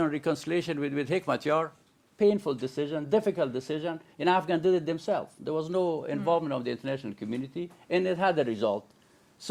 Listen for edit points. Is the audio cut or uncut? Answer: uncut